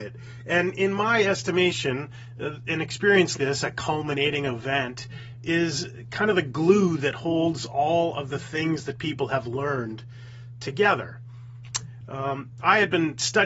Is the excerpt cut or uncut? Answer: cut